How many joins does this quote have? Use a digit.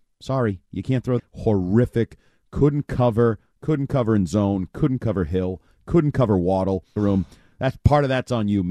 2